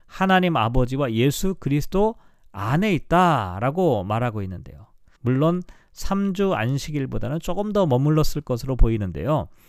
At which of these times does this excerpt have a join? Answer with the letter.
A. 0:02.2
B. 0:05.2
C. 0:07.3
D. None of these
B